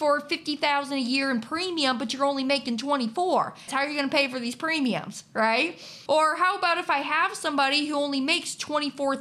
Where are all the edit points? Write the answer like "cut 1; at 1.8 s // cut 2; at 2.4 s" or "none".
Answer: cut 1; at 3.7 s // cut 2; at 6.1 s